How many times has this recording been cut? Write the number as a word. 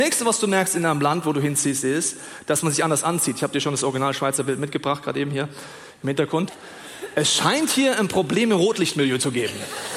one